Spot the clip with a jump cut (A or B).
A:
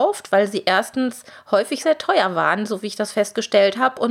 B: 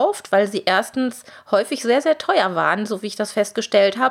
A